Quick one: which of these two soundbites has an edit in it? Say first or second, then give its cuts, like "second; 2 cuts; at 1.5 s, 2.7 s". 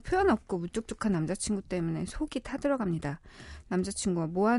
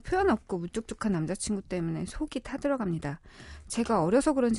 first; 1 cut; at 3.6 s